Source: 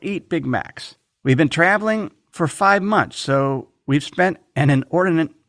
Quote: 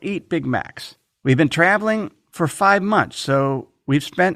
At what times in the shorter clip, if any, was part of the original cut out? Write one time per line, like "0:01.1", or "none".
none